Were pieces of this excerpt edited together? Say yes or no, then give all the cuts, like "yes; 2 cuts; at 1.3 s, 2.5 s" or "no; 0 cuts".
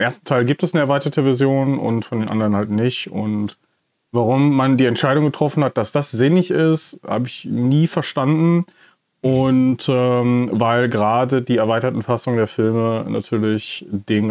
no; 0 cuts